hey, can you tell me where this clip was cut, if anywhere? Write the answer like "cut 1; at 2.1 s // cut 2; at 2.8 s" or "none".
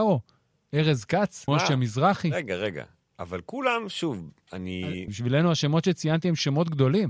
cut 1; at 1.5 s // cut 2; at 5.1 s